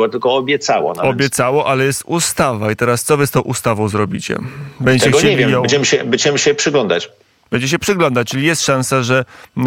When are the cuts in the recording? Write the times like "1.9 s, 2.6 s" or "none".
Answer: none